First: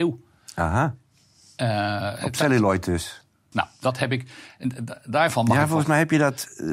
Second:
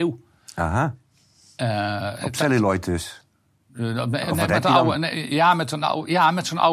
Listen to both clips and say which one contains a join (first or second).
first